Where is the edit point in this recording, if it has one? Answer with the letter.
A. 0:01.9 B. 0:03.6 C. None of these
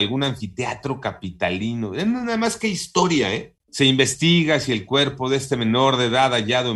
B